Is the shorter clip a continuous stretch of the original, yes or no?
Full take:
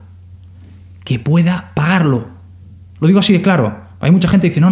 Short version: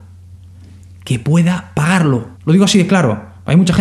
no